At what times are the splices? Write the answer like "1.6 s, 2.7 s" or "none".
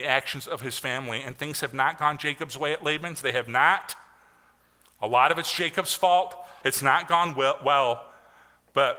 6.6 s